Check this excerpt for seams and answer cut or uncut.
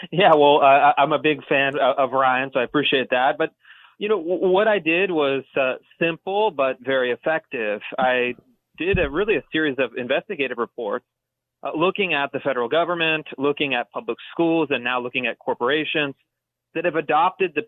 uncut